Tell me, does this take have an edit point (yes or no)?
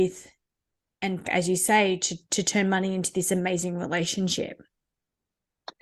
yes